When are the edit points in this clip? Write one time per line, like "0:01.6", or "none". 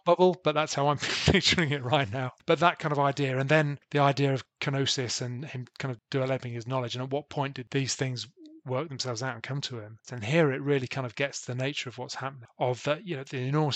0:10.0